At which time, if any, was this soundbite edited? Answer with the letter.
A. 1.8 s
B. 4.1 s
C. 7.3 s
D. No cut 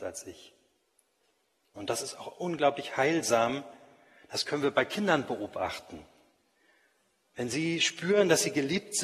A